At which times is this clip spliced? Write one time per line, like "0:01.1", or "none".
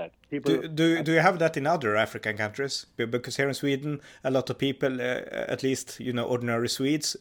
0:03.0

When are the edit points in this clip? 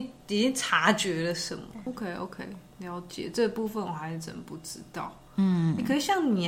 0:01.9

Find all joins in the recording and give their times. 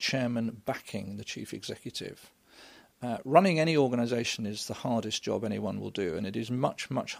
none

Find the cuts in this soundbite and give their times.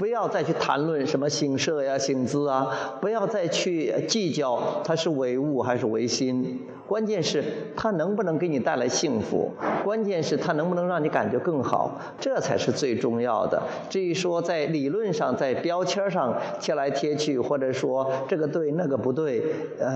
0:12.2

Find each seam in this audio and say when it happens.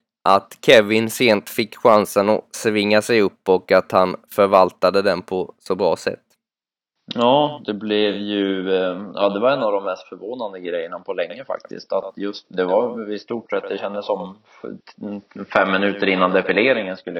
none

